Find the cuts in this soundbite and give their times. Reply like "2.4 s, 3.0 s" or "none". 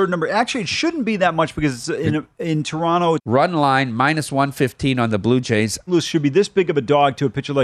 3.2 s, 5.9 s